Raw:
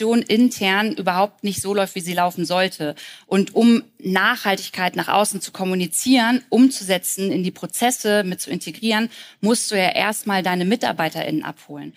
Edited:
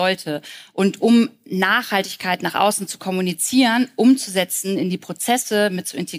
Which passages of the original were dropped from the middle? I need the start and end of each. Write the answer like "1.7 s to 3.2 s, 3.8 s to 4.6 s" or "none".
none